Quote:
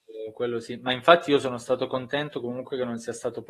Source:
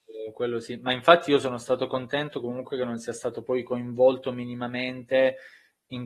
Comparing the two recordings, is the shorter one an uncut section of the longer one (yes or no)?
yes